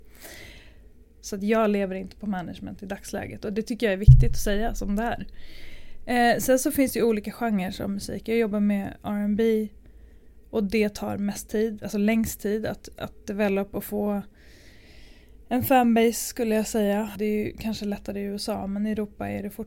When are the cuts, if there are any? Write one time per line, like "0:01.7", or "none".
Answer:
0:01.1
0:17.2